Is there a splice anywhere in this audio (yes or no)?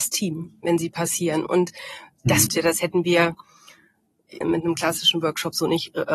yes